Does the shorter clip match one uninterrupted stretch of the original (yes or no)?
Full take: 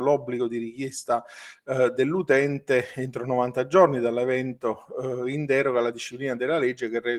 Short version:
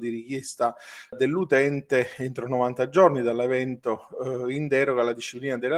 no